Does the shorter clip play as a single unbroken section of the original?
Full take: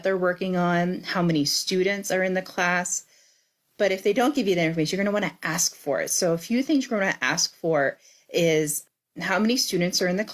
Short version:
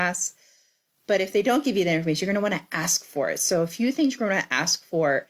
yes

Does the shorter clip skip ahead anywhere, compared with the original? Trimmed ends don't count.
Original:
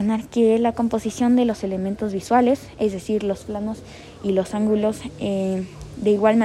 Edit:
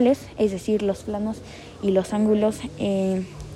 no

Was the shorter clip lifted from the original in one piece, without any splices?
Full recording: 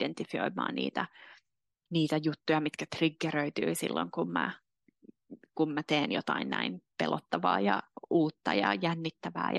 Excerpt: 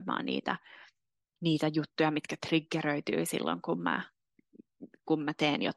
yes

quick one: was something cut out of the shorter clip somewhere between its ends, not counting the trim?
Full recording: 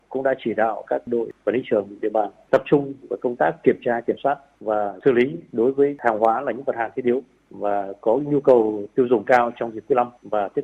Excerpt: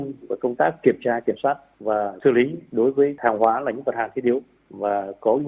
no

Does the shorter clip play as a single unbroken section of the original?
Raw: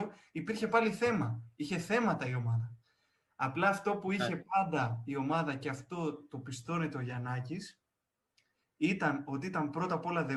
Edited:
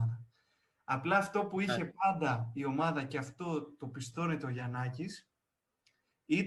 yes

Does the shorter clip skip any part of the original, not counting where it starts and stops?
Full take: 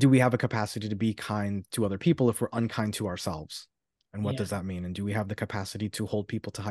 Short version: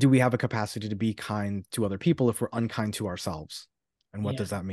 no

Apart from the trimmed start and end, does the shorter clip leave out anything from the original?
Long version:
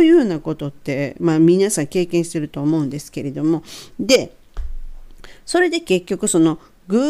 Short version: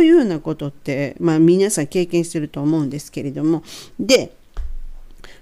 no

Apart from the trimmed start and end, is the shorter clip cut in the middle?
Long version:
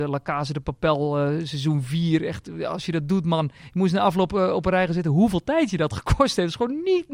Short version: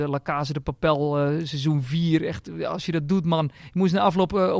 no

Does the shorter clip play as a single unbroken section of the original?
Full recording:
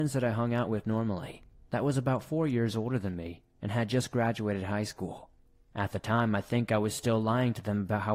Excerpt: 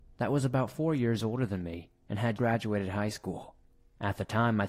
no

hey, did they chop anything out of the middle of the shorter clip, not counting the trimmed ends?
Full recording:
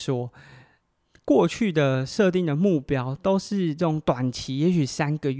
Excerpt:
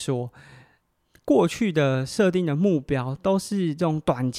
no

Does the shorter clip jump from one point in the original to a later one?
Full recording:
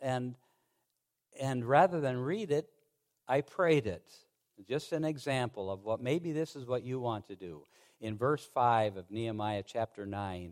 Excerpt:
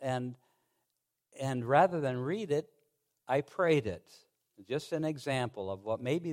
no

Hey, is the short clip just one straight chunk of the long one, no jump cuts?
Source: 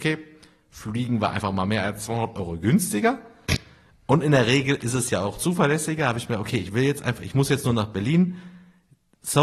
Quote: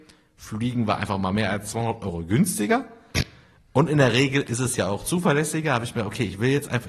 yes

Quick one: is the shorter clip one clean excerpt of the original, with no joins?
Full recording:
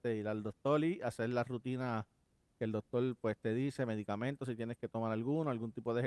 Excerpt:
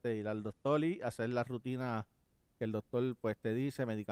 yes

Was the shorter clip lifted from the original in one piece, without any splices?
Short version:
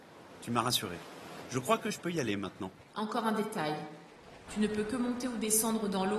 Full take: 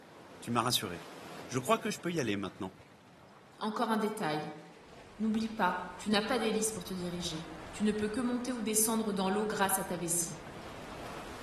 no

